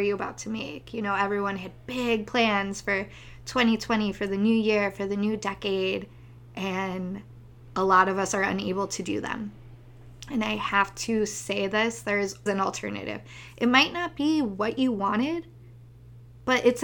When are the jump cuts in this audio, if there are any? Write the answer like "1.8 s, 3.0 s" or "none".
12.5 s